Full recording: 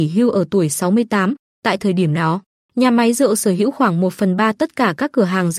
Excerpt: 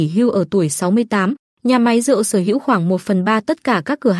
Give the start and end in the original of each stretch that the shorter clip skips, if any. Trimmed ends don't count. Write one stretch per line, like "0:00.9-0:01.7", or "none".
0:01.5-0:02.6